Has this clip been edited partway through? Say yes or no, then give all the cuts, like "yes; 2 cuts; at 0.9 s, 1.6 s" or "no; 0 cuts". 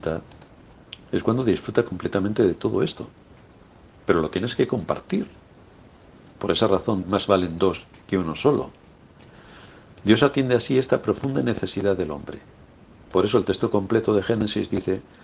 yes; 2 cuts; at 7.0 s, 13.1 s